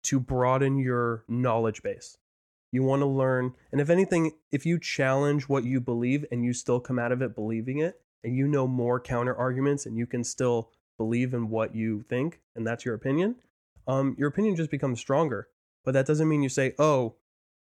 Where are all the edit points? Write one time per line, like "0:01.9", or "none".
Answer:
none